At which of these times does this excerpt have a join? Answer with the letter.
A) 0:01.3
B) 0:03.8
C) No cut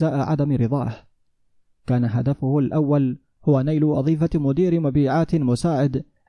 C